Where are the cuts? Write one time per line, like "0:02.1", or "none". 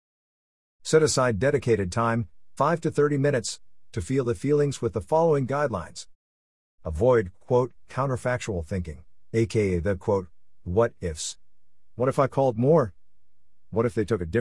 none